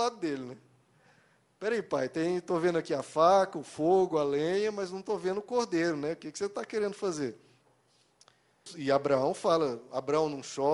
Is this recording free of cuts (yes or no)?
yes